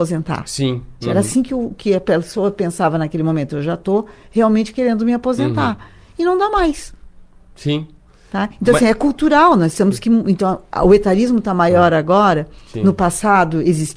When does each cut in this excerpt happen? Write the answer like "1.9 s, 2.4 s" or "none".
1.0 s